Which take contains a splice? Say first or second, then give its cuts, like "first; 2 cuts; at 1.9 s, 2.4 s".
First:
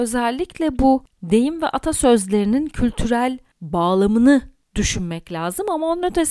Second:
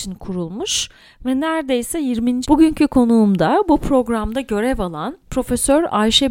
second; 1 cut; at 2.4 s